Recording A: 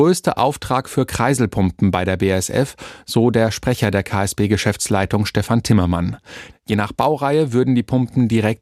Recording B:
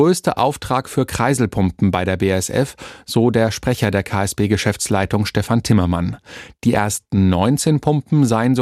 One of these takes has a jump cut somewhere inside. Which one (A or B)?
A